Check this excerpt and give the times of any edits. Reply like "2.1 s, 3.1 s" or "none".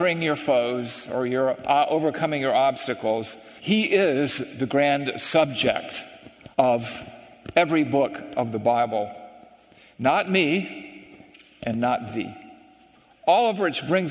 3.6 s, 6.5 s